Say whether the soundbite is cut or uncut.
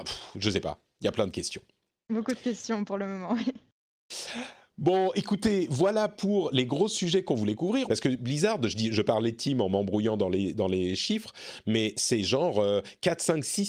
cut